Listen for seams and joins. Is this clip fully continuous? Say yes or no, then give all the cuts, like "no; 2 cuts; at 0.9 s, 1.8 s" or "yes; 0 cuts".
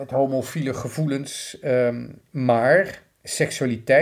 yes; 0 cuts